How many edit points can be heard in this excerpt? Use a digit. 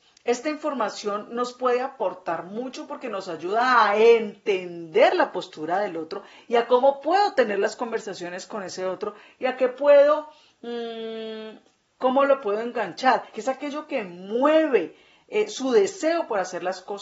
2